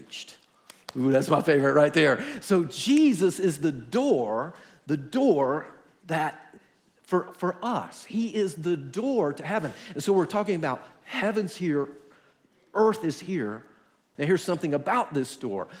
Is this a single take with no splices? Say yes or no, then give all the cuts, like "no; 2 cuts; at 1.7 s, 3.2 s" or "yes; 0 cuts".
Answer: no; 1 cut; at 14.2 s